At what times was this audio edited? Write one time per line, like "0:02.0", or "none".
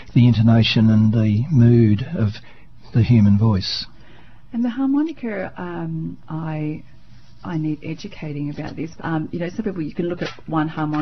0:06.2
0:09.0